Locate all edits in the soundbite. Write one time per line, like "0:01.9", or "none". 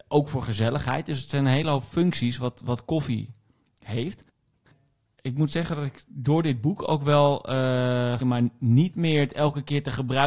0:08.2